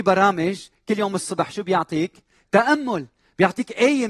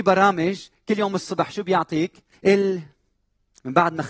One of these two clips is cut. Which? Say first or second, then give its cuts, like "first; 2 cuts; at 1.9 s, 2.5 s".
second; 1 cut; at 2.3 s